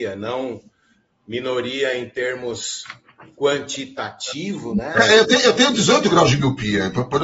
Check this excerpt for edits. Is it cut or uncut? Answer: cut